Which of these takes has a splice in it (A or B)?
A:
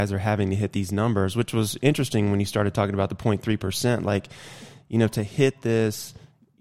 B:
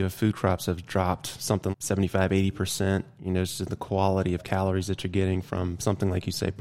B